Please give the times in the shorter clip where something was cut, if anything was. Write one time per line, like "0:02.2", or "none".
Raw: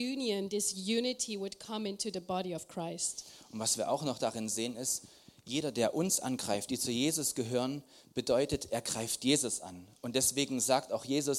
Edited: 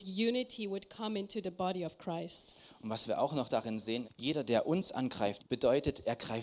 0:04.0
0:05.4